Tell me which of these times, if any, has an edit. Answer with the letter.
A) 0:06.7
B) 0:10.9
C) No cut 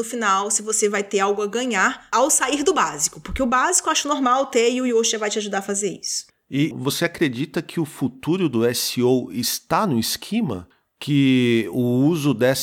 A